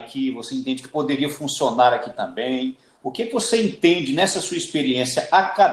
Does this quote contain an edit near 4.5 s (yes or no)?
no